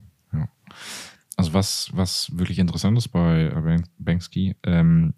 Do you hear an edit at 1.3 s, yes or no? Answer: no